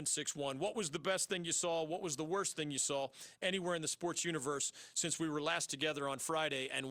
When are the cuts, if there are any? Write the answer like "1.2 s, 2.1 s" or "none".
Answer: none